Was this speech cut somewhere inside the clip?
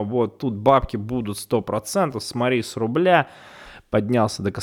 no; 0 cuts

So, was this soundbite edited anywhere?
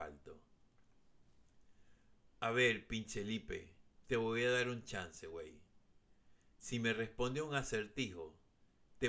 no; 0 cuts

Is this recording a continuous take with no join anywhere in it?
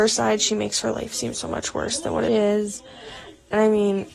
no; 1 cut; at 2.3 s

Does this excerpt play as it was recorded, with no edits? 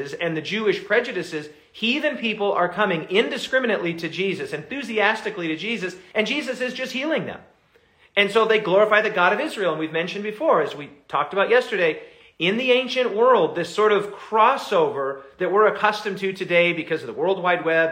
yes; 0 cuts

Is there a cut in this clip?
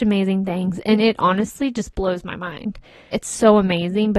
yes; 1 cut; at 3.1 s

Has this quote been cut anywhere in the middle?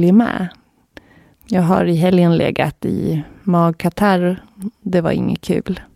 yes; 1 cut; at 1.4 s

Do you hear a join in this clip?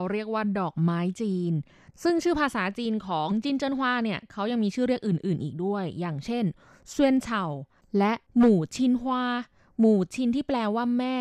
no; 0 cuts

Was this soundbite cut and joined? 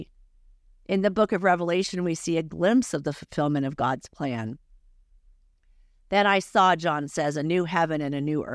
no; 0 cuts

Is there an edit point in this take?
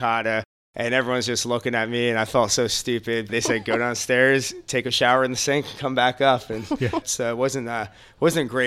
yes; 2 cuts; at 3.3 s, 7.0 s

